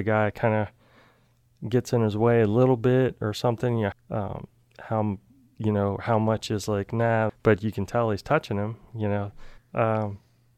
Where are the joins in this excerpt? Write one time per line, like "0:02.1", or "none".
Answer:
0:03.9
0:07.3
0:09.6